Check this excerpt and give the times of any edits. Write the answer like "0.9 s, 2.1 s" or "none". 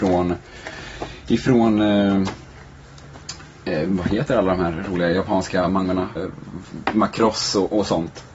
6.2 s